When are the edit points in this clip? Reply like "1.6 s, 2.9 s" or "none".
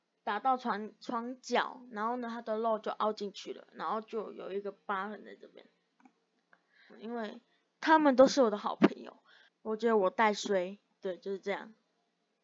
6.9 s, 9.5 s